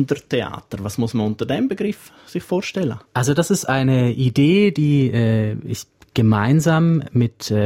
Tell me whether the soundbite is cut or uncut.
uncut